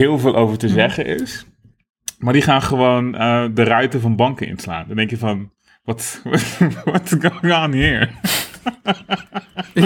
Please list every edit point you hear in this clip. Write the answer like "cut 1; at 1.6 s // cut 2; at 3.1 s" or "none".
none

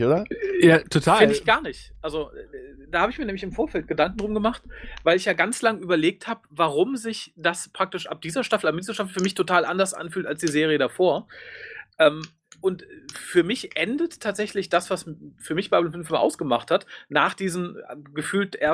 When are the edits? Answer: none

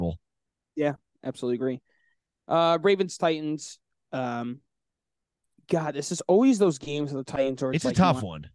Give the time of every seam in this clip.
none

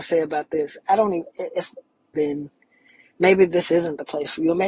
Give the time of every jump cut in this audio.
cut 1; at 2.1 s

